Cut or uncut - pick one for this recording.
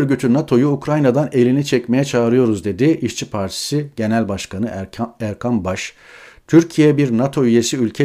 uncut